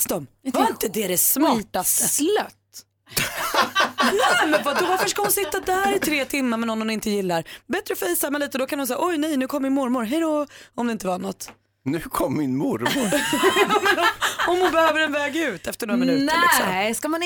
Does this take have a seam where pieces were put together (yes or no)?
no